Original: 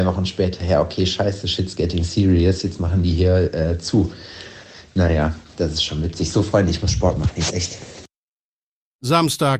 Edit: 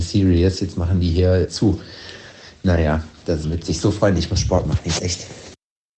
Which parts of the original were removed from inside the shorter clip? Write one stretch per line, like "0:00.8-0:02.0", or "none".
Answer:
0:03.5-0:03.8
0:05.7-0:05.9

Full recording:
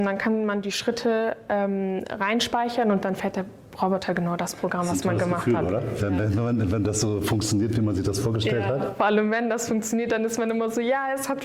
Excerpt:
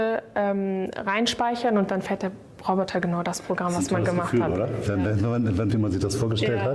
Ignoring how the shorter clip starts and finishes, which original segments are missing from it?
0:06.8-0:07.7

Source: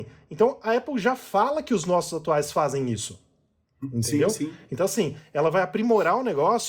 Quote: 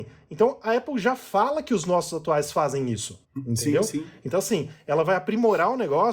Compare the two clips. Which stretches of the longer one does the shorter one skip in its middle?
0:03.2-0:03.7

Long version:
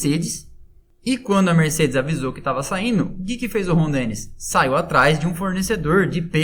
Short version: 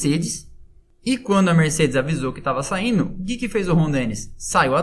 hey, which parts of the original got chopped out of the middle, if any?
none

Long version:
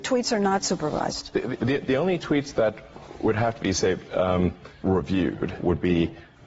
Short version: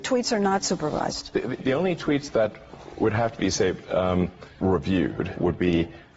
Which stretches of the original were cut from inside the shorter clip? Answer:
0:01.6-0:01.8

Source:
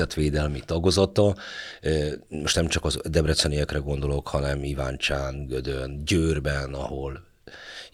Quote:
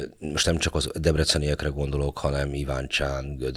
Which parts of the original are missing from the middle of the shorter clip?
none

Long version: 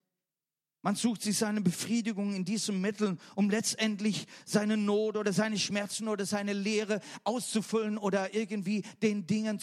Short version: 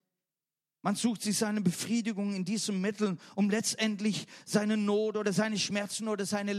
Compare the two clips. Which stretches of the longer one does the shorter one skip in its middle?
none

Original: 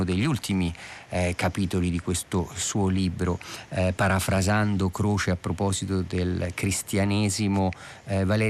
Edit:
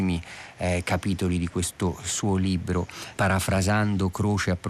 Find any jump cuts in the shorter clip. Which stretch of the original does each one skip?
0:03.7-0:04.0

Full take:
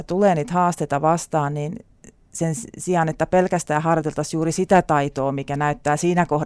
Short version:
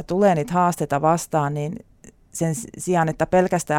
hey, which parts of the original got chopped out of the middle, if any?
none

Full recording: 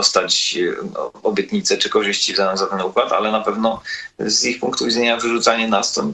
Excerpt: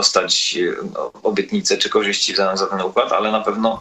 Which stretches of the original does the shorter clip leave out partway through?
none

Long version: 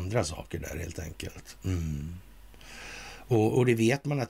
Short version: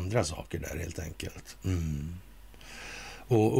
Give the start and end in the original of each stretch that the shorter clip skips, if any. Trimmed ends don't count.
none

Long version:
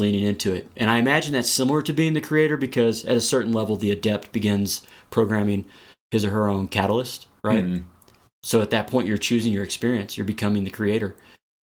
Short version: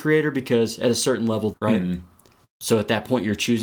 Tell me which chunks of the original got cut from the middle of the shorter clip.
0:03.8-0:07.3

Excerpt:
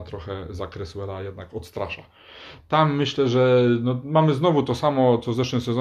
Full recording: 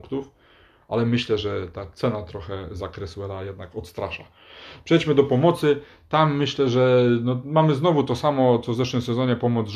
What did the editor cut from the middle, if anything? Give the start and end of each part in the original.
0:04.8-0:06.0

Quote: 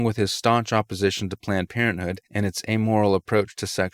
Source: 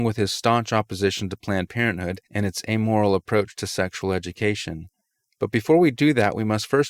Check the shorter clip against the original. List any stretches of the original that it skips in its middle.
none

